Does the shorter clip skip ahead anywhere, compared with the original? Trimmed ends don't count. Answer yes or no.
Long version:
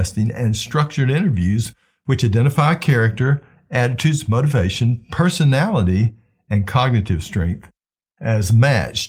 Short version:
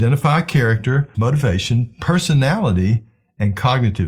yes